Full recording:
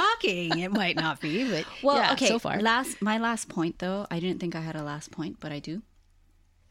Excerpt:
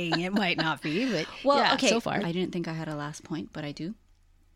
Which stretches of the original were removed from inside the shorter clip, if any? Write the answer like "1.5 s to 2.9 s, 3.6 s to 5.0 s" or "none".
2.6 s to 4.1 s